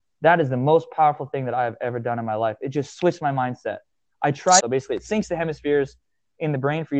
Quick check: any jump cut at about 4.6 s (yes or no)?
yes